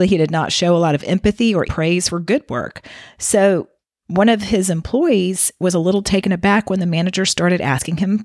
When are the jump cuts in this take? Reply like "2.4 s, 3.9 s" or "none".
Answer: 1.7 s

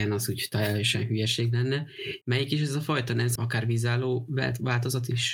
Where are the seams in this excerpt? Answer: 2.2 s, 3.4 s

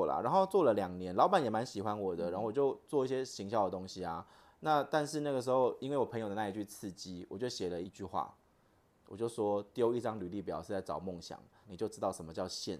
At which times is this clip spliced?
7.8 s, 11.6 s

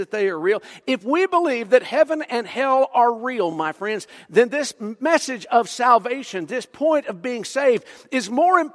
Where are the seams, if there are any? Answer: none

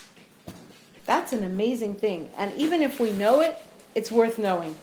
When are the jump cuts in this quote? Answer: none

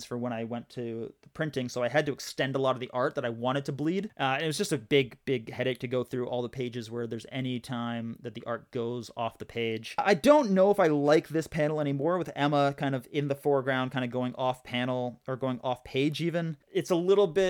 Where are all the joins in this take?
none

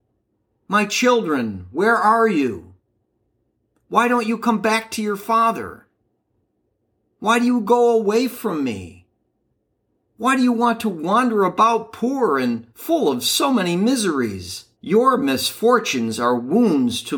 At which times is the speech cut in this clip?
12.7 s, 14.7 s

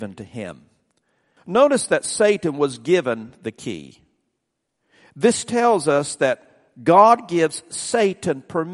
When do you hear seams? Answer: 1.4 s

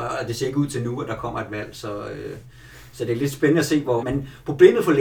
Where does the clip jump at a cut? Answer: 4.0 s

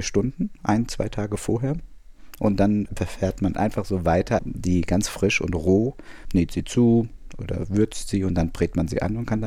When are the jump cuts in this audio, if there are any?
4.4 s, 6.3 s

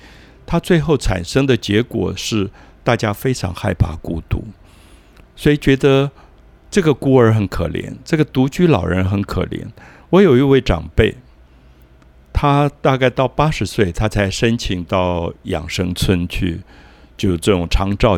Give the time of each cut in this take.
none

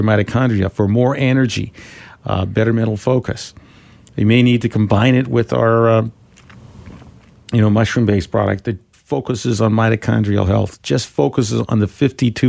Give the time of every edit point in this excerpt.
8.9 s

